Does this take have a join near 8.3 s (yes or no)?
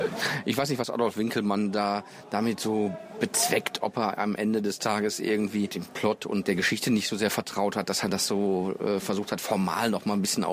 no